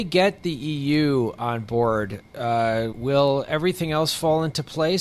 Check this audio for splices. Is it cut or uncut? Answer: cut